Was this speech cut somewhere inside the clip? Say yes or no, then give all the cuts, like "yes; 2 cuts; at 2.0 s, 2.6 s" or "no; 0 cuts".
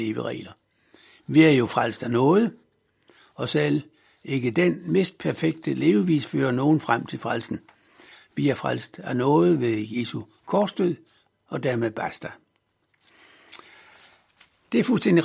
no; 0 cuts